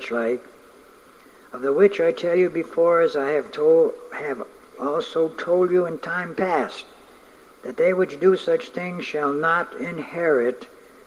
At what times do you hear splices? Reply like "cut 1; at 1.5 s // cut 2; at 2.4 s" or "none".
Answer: none